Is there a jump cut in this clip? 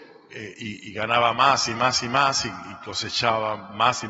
no; 0 cuts

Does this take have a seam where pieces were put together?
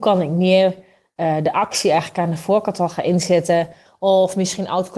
yes; 1 cut; at 3.9 s

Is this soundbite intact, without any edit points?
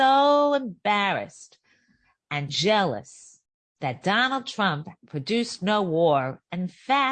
no; 2 cuts; at 2.5 s, 5.0 s

